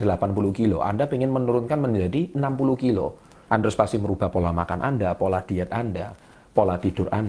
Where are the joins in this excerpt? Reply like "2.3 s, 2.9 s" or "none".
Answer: 3.5 s